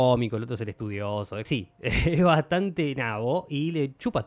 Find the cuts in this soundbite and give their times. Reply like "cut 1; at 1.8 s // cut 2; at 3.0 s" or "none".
cut 1; at 1.4 s